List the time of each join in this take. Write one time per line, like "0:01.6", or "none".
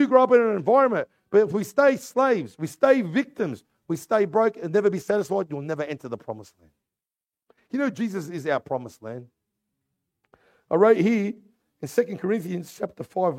none